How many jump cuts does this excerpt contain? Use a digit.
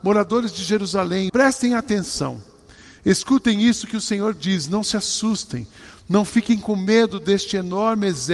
1